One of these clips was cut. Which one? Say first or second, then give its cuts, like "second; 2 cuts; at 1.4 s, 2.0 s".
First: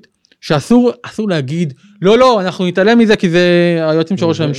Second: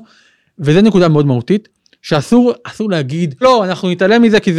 second; 1 cut; at 3.4 s